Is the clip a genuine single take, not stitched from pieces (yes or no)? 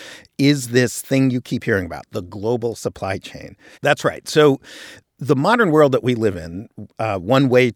no